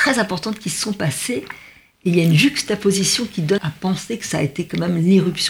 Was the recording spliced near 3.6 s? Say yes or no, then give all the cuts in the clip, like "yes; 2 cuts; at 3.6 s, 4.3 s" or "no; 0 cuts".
yes; 1 cut; at 3.6 s